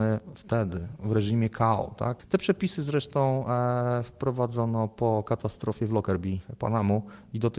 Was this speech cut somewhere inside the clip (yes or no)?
yes